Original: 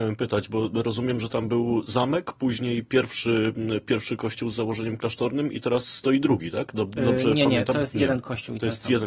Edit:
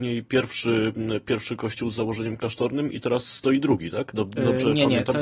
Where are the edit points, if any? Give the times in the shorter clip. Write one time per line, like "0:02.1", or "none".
none